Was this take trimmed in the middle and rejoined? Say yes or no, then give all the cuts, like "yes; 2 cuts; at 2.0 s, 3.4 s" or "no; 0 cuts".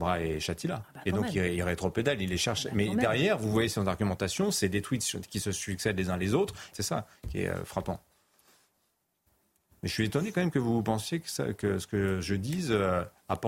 yes; 1 cut; at 6.7 s